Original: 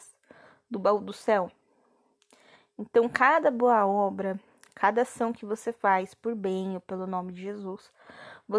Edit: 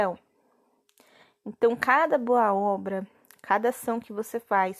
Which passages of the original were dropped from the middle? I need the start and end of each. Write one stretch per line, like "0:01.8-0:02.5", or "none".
none